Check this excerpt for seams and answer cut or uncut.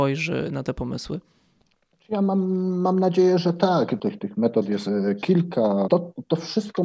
cut